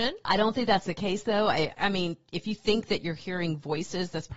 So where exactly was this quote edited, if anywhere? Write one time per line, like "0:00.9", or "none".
none